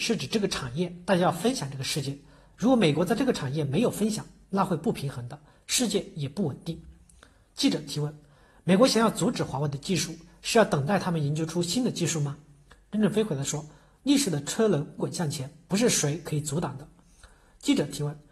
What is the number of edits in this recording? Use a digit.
2